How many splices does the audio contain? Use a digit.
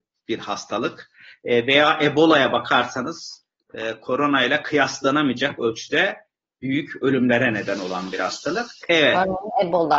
1